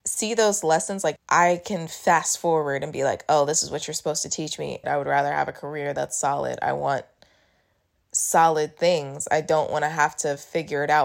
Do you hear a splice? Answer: yes; 2 cuts; at 1.2 s, 4.8 s

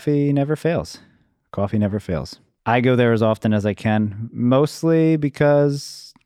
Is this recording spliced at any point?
yes; 1 cut; at 2.6 s

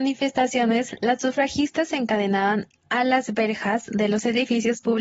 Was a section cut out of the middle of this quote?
no; 0 cuts

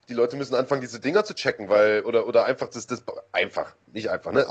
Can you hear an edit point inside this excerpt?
yes; 1 cut; at 2.0 s

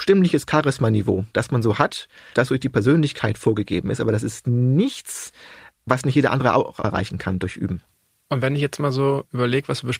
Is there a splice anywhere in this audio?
no; 0 cuts

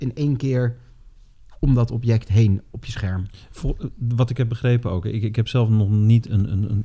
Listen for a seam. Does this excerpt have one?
no; 0 cuts

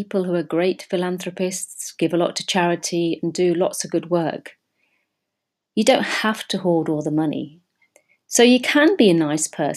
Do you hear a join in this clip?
no; 0 cuts

